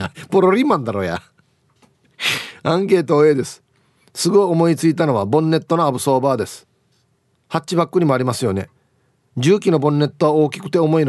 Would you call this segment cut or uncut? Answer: uncut